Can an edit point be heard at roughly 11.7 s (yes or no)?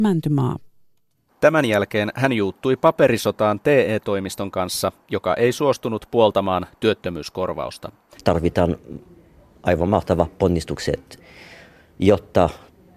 no